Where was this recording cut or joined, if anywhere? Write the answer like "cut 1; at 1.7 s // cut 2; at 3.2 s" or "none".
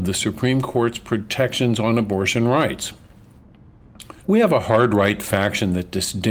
cut 1; at 4.2 s